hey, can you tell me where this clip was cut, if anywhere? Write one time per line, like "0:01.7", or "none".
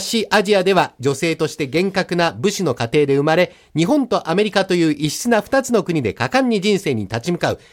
none